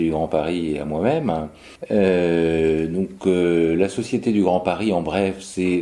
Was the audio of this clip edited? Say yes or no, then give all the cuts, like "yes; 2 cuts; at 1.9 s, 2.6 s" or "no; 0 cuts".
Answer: no; 0 cuts